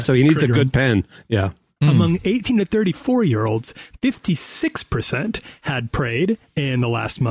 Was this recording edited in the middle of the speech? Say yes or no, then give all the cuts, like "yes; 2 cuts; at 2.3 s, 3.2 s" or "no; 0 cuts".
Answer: yes; 1 cut; at 1.8 s